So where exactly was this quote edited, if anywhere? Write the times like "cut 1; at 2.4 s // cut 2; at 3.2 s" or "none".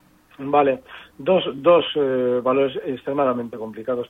none

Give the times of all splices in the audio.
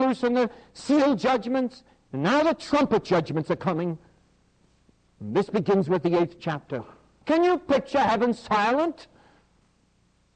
cut 1; at 7.2 s

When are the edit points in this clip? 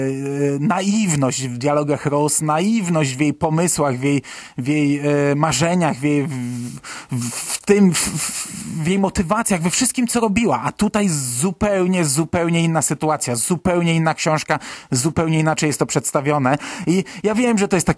none

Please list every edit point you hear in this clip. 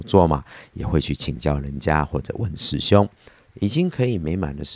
cut 1; at 3.5 s

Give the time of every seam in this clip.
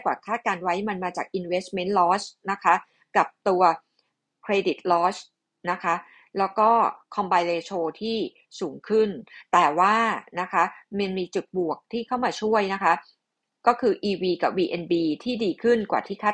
none

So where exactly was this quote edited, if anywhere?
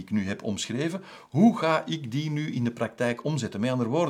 none

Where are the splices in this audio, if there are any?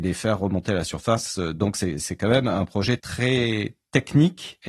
none

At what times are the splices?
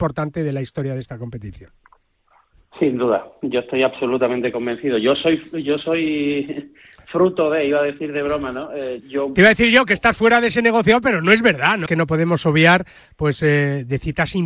cut 1; at 9.0 s // cut 2; at 11.9 s

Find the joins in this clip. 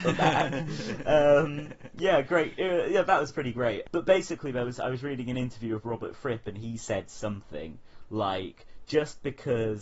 none

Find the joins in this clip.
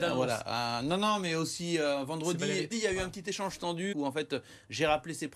cut 1; at 2.7 s // cut 2; at 3.9 s

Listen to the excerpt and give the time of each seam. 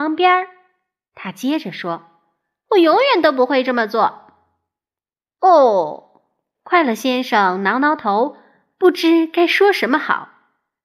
none

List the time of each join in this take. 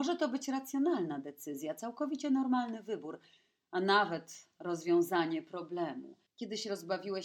cut 1; at 6.3 s

